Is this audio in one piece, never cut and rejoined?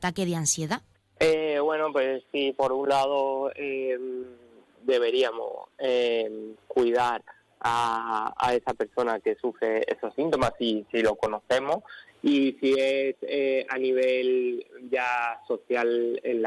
no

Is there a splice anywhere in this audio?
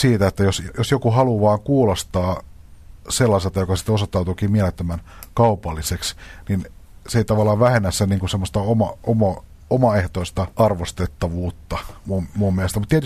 yes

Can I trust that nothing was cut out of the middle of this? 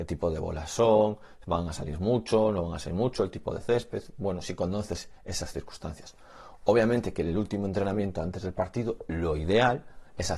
yes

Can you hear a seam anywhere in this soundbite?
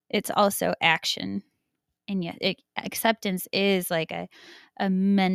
no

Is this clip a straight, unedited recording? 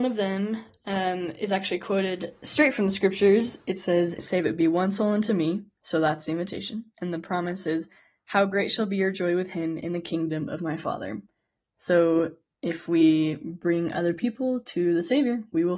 no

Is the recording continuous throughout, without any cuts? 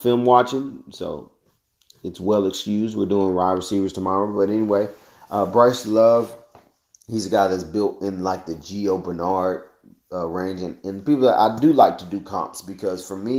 yes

